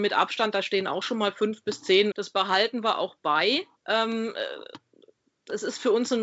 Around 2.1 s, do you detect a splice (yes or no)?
yes